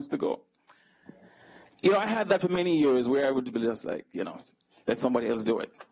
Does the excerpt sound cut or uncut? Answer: cut